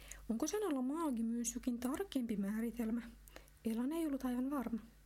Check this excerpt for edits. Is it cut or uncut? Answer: uncut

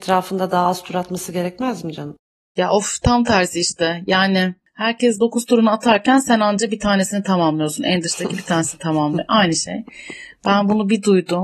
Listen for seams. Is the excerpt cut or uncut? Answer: uncut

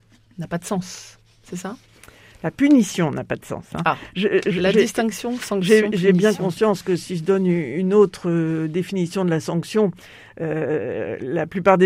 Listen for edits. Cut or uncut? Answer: uncut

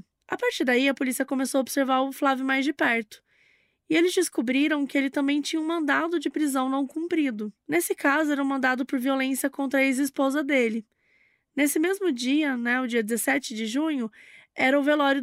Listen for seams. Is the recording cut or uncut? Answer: uncut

